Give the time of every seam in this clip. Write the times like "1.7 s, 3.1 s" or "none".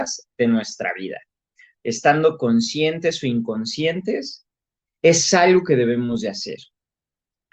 none